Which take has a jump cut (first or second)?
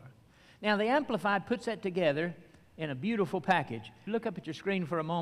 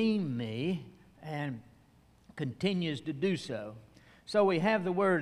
first